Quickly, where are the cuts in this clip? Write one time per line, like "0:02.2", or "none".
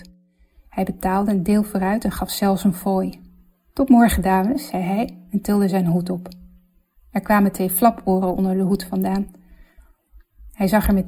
none